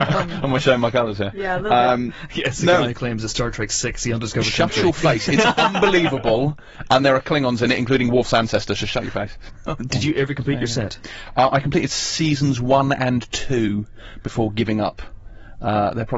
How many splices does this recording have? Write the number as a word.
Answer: one